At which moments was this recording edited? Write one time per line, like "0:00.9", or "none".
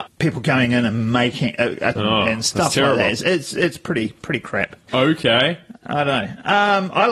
0:02.0
0:04.9